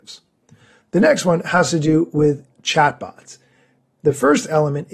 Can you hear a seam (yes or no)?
yes